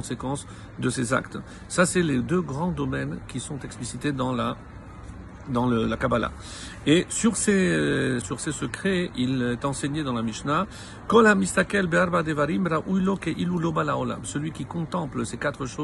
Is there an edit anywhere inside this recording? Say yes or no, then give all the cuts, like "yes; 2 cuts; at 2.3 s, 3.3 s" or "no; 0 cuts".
yes; 1 cut; at 8.2 s